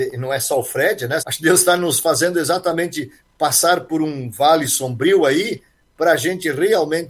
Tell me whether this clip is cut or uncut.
cut